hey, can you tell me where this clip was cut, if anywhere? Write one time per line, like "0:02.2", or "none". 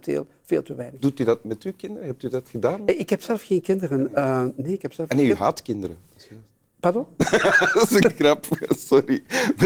none